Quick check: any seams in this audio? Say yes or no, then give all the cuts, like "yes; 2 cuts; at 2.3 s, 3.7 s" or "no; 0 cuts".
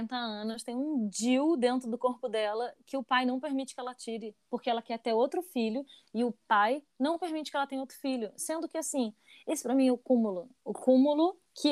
no; 0 cuts